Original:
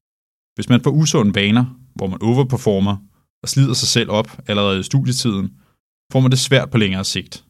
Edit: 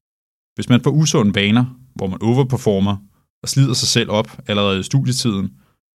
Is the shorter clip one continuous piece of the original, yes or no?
yes